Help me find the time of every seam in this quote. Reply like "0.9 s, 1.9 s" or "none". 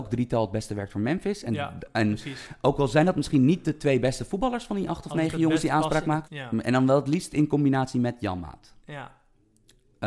6.2 s